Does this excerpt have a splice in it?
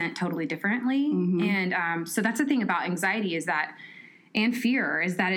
no; 0 cuts

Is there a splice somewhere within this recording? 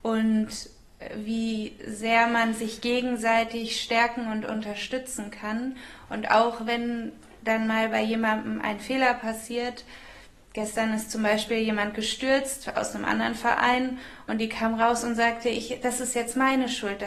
no; 0 cuts

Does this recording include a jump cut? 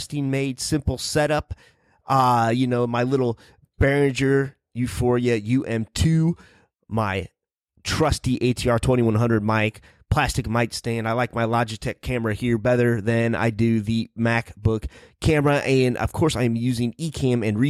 no; 0 cuts

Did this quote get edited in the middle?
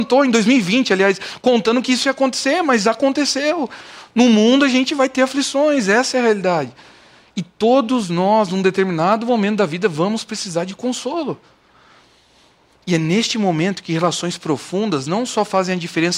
no; 0 cuts

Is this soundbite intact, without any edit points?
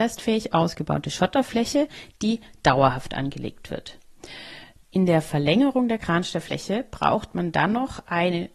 no; 1 cut; at 4.8 s

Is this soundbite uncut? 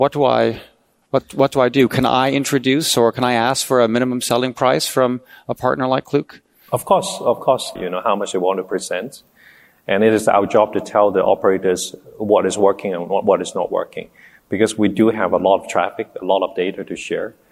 no; 2 cuts; at 1.0 s, 7.8 s

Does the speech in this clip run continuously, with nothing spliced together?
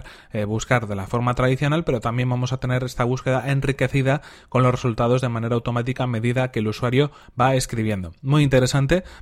yes; 0 cuts

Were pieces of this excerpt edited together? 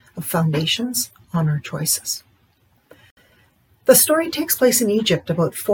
no; 0 cuts

